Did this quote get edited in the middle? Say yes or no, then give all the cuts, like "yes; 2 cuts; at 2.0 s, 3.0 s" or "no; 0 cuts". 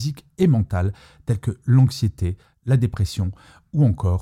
no; 0 cuts